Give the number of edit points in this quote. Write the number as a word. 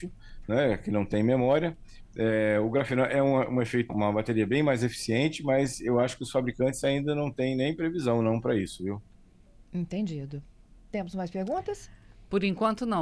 one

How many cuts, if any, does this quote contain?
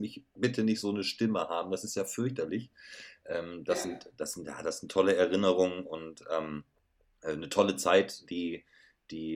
zero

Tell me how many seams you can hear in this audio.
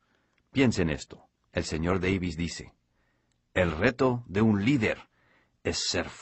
one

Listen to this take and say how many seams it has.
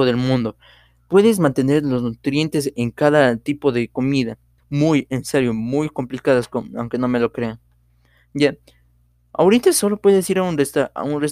one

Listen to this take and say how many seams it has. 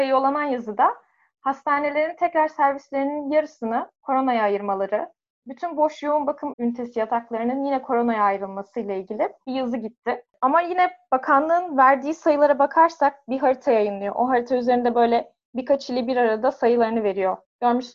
one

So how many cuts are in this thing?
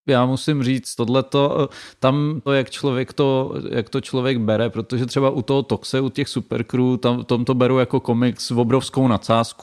two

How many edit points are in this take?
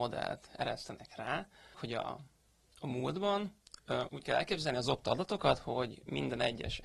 two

